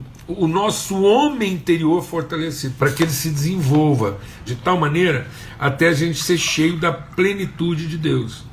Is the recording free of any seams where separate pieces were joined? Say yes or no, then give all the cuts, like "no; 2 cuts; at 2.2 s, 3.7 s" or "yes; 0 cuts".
no; 2 cuts; at 2.8 s, 4.5 s